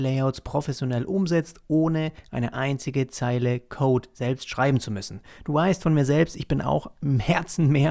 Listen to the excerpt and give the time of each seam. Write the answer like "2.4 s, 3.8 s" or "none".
none